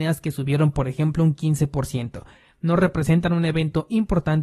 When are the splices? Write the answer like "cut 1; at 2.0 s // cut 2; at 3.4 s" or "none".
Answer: cut 1; at 2.5 s

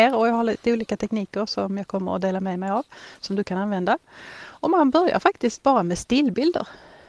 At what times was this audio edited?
none

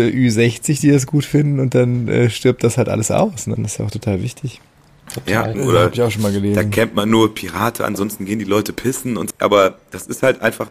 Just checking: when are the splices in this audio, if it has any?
cut 1; at 3.6 s // cut 2; at 5.5 s // cut 3; at 9.3 s

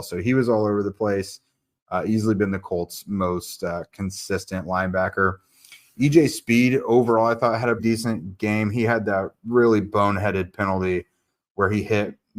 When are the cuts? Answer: cut 1; at 7.8 s

